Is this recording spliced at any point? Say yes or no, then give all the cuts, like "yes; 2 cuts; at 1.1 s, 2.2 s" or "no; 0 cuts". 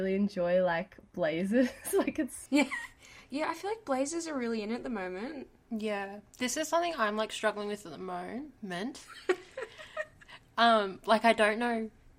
yes; 1 cut; at 8.6 s